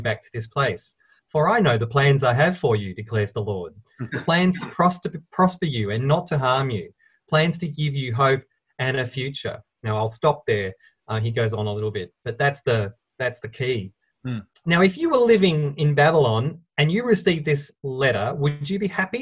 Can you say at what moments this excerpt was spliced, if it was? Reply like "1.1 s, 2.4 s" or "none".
14.6 s